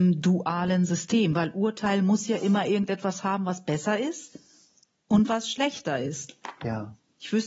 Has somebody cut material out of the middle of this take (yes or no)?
no